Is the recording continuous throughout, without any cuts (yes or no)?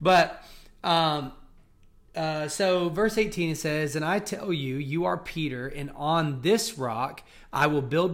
yes